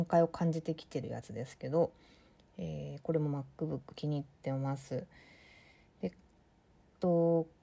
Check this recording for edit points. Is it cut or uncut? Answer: uncut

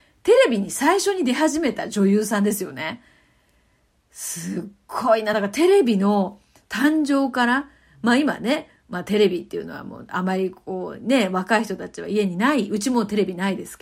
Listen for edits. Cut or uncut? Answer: uncut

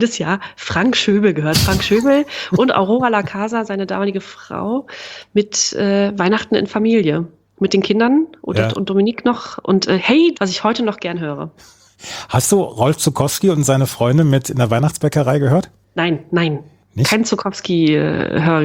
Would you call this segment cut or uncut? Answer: cut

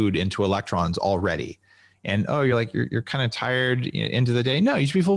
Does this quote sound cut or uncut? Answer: uncut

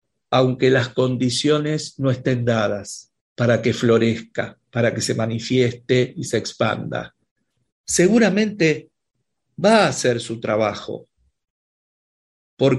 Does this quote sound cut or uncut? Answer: cut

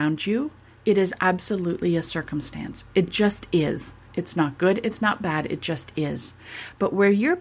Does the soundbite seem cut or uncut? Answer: uncut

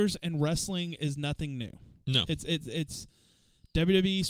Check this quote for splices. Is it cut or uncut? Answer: uncut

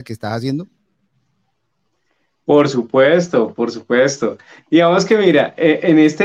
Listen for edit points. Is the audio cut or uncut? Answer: uncut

